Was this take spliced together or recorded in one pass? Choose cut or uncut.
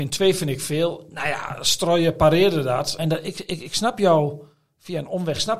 cut